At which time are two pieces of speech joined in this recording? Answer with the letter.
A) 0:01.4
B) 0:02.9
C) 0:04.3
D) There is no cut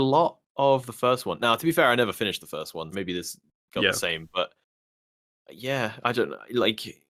B